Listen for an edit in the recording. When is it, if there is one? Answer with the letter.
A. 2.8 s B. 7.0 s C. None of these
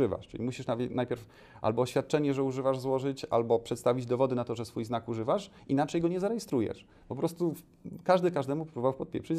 C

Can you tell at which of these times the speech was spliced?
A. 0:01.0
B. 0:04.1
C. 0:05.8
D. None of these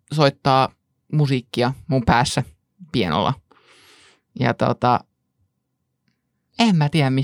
D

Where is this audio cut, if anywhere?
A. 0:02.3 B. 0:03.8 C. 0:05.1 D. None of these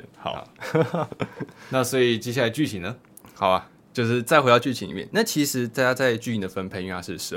D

